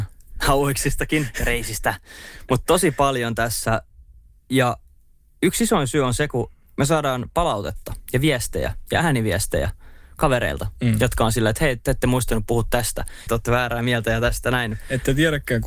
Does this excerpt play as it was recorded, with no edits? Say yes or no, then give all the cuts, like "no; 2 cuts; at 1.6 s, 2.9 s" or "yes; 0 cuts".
no; 1 cut; at 13.3 s